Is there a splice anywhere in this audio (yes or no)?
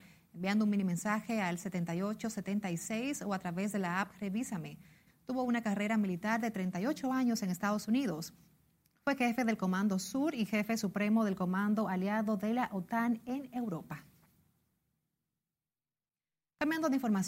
yes